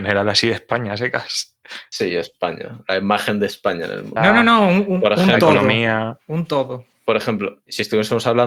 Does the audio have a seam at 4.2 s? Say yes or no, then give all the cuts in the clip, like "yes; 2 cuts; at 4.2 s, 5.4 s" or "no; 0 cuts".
yes; 1 cut; at 4.2 s